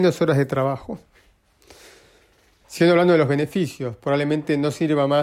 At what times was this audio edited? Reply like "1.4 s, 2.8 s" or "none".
2.6 s